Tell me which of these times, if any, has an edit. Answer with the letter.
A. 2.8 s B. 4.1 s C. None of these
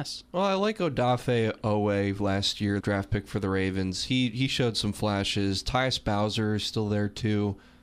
A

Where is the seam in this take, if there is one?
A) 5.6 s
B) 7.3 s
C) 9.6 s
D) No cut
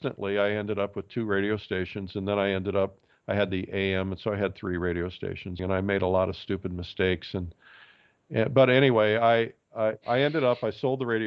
A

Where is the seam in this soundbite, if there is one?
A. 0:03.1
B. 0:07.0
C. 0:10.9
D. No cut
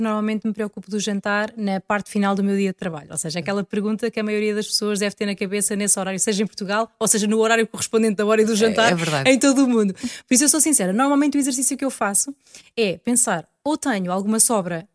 A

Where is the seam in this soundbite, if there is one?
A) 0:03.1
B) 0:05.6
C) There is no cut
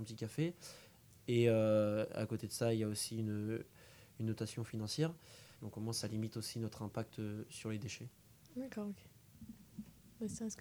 B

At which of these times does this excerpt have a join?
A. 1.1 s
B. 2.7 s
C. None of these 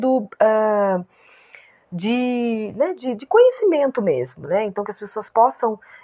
C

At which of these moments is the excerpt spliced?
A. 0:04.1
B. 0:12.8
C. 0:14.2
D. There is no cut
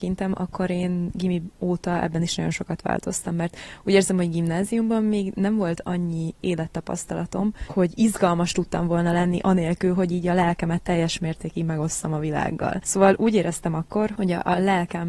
D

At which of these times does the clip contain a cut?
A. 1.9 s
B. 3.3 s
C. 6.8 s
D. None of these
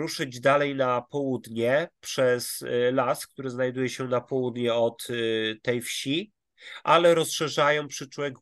D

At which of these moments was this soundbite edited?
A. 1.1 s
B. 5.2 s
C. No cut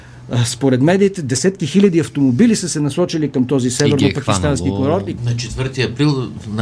B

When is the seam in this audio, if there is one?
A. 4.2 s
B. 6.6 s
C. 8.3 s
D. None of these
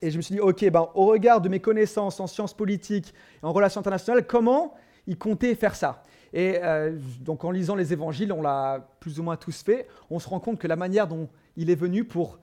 D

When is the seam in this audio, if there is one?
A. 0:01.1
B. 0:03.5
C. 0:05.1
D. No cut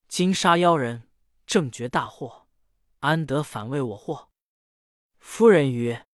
D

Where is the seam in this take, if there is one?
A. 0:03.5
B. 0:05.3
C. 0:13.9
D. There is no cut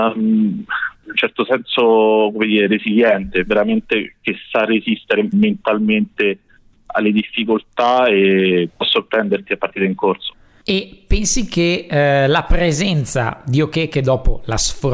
B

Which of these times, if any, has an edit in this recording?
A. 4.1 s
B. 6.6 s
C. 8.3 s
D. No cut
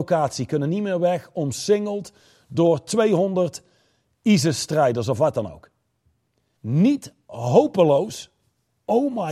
B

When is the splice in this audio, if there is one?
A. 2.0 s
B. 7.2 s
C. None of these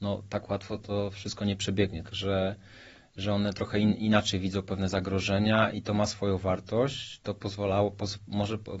A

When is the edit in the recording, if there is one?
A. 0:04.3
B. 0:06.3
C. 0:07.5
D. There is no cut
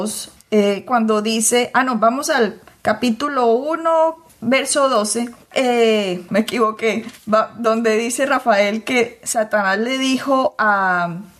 B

